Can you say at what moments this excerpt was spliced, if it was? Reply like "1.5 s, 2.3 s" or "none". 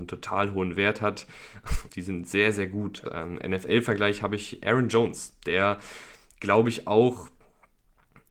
1.9 s, 3.1 s